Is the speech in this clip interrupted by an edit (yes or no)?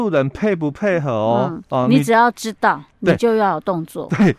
no